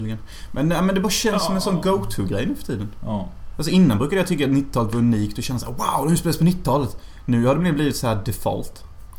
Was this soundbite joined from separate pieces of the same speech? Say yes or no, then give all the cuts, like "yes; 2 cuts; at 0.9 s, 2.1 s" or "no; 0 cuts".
no; 0 cuts